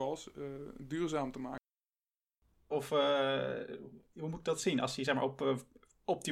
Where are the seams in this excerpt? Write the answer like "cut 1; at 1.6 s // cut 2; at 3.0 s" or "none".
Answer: cut 1; at 2.7 s